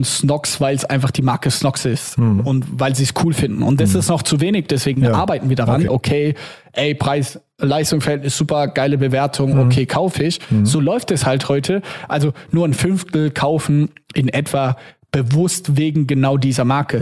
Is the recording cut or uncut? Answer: cut